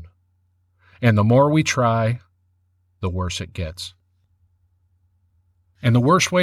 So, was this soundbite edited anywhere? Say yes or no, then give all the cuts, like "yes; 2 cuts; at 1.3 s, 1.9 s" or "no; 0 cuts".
no; 0 cuts